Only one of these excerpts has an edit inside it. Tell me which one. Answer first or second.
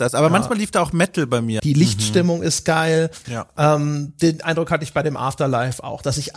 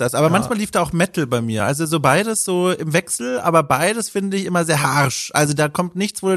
first